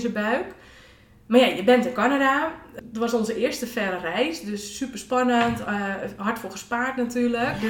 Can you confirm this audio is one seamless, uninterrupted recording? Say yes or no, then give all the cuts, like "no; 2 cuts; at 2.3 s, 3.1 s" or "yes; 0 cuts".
no; 1 cut; at 2.8 s